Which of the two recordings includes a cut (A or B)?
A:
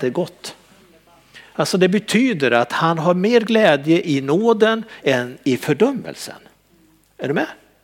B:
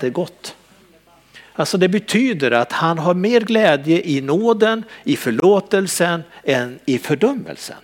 A